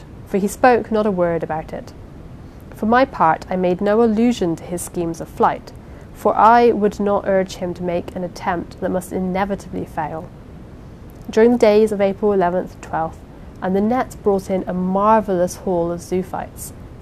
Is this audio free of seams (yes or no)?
no